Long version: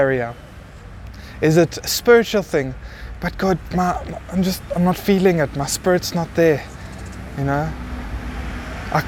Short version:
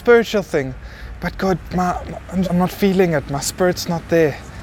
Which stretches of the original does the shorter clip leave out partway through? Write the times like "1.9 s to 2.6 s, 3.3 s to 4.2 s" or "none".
4.4 s to 4.7 s